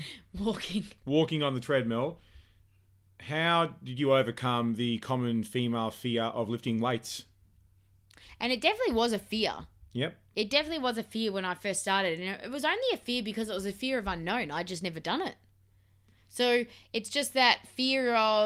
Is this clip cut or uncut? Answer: uncut